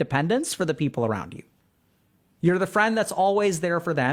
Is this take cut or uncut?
uncut